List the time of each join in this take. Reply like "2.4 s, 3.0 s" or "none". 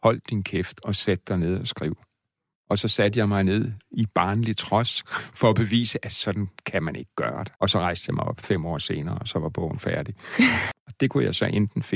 7.6 s, 10.7 s